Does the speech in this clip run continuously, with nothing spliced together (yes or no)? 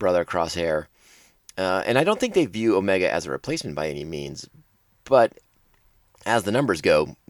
yes